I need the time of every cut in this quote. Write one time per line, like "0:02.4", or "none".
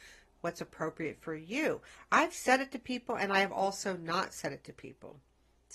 none